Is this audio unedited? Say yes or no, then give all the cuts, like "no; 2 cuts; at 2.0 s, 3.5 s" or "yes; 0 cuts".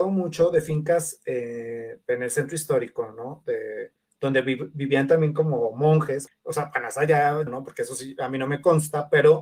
no; 2 cuts; at 6.3 s, 7.5 s